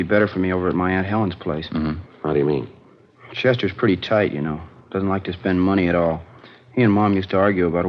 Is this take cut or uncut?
cut